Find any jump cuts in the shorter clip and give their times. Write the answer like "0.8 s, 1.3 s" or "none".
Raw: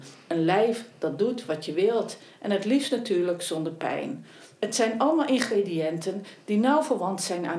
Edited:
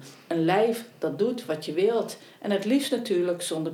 none